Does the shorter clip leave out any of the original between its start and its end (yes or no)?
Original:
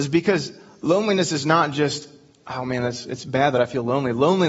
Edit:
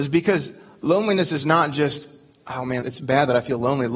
yes